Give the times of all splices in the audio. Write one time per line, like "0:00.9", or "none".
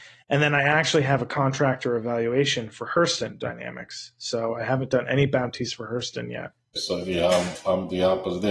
0:06.8

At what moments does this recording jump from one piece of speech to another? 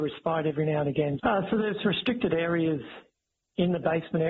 0:01.2

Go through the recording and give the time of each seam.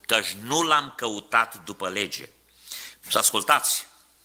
0:03.0

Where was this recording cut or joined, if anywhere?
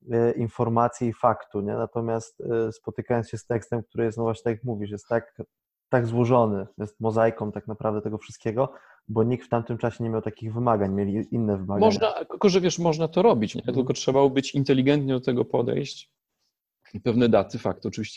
0:13.5

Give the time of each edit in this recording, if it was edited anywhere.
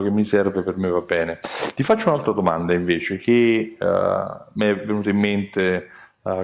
none

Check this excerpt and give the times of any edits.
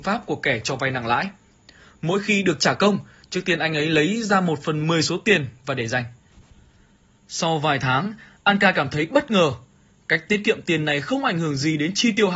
none

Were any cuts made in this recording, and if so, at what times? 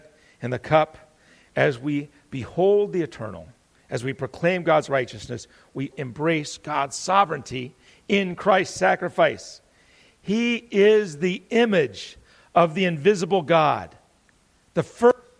0:05.9

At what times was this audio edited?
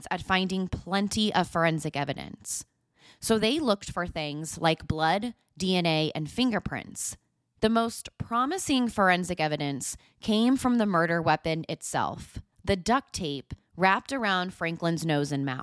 0:07.6
0:12.5

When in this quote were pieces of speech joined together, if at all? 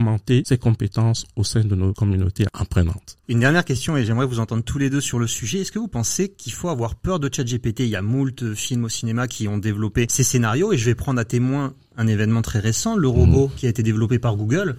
none

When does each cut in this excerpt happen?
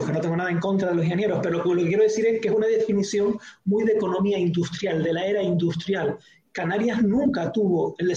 none

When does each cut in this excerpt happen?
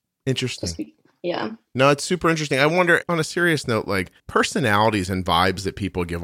0:03.0
0:04.2

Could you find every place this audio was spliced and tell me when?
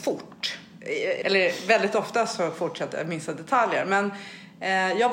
0:01.2

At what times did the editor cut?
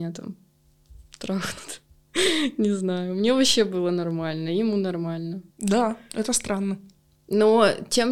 0:05.5

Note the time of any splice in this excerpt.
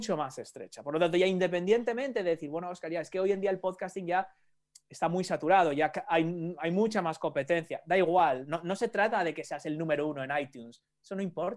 none

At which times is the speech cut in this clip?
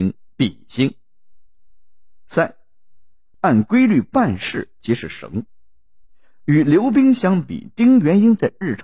0:03.3

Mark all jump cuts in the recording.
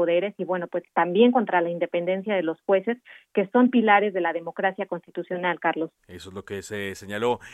0:06.0

